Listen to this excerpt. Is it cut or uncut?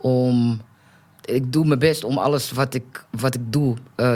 cut